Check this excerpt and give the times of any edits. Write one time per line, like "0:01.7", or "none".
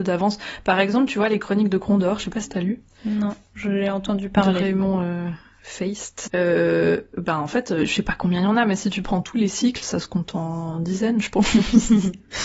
0:06.3
0:09.8